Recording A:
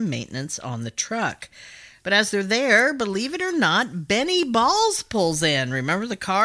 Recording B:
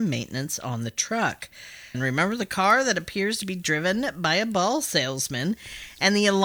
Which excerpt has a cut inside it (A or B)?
B